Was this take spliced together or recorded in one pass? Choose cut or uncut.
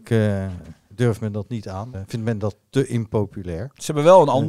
cut